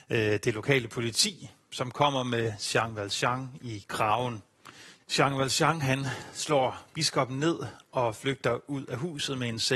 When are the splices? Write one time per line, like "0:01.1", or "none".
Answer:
0:05.0

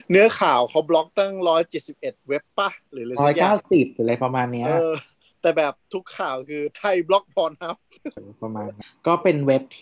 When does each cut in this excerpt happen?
0:08.2

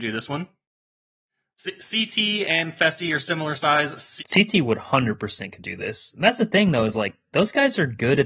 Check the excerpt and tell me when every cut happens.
0:04.2

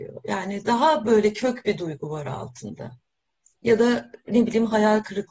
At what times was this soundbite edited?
none

